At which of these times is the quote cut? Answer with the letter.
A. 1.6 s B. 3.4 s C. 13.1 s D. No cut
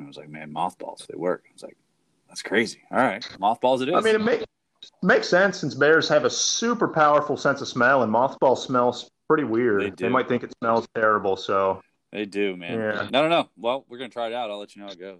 B